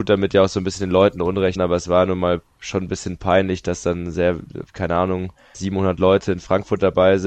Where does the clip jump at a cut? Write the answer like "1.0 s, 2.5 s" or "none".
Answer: 1.6 s, 5.5 s